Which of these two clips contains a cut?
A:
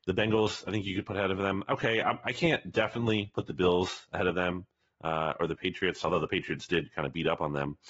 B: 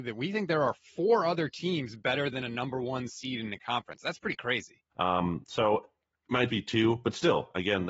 B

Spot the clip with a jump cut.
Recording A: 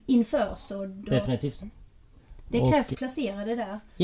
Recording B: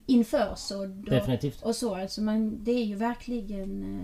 A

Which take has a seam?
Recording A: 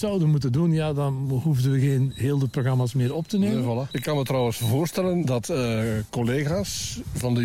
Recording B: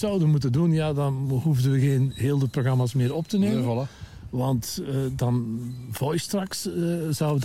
A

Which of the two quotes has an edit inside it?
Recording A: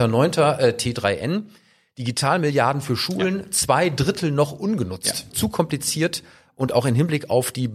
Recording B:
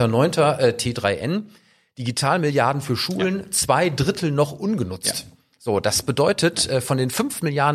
A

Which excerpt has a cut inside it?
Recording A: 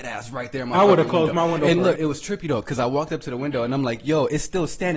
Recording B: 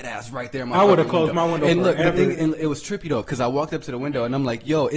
A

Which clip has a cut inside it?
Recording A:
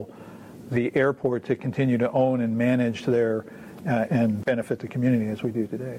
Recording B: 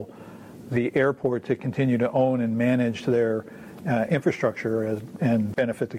A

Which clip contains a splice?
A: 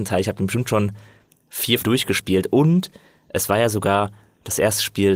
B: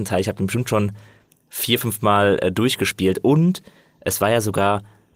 A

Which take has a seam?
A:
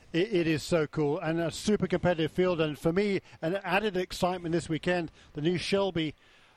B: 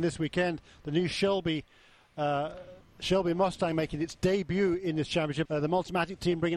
B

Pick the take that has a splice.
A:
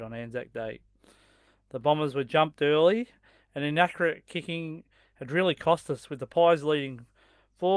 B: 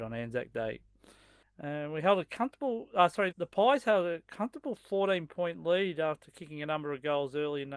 B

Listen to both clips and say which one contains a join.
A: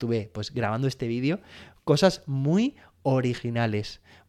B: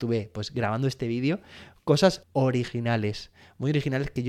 B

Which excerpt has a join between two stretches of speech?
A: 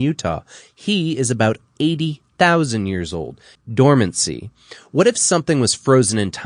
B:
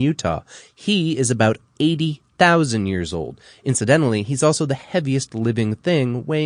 A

